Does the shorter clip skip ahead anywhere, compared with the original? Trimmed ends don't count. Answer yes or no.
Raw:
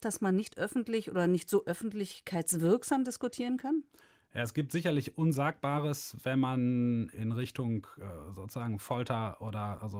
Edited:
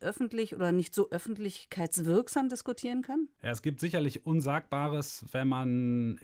yes